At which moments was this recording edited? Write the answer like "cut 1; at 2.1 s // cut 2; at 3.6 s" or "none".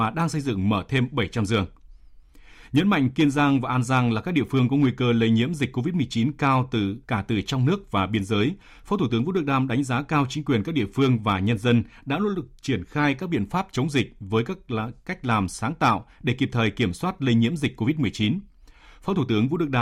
cut 1; at 7.0 s